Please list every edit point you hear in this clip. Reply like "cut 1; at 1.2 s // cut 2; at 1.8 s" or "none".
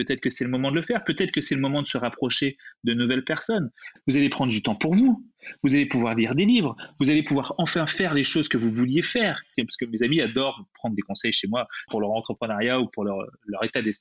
cut 1; at 4.0 s // cut 2; at 9.5 s // cut 3; at 11.9 s